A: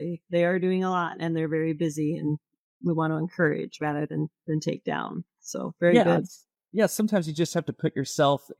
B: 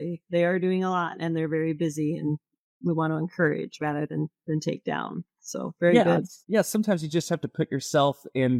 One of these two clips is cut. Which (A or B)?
B